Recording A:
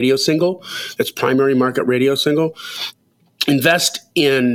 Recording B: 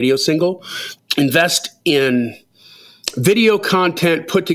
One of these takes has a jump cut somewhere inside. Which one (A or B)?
B